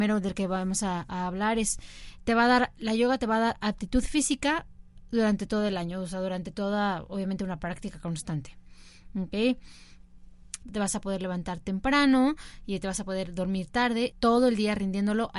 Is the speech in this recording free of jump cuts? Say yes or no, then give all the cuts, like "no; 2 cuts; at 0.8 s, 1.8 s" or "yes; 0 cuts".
no; 2 cuts; at 10.6 s, 14.1 s